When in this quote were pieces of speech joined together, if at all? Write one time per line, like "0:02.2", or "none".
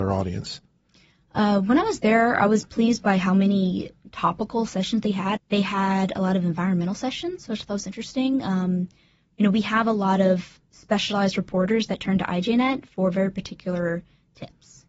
0:05.4